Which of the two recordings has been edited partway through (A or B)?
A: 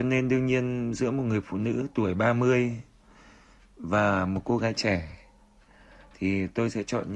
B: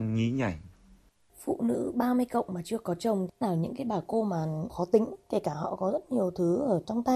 B